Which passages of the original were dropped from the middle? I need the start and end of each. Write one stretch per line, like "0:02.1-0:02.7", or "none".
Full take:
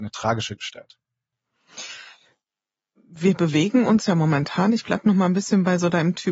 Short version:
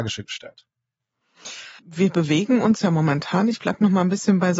0:02.1-0:03.0